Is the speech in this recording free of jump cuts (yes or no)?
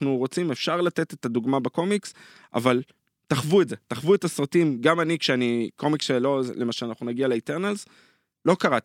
yes